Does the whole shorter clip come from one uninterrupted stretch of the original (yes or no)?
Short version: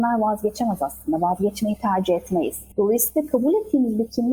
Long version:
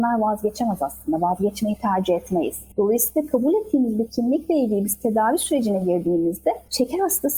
yes